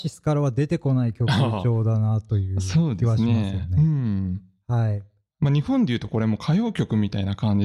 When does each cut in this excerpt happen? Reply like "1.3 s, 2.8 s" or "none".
none